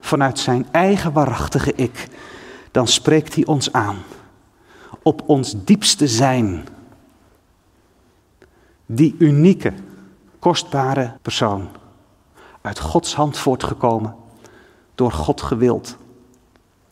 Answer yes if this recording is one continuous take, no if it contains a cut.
no